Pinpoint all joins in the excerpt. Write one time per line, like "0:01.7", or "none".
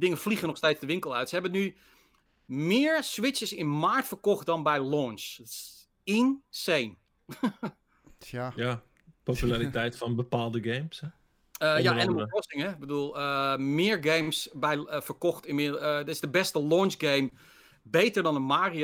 none